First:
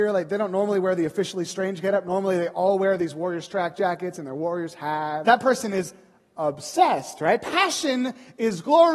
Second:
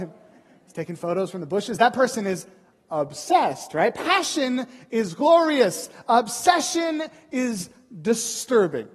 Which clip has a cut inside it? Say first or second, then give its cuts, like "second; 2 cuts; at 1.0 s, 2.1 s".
first; 1 cut; at 5.2 s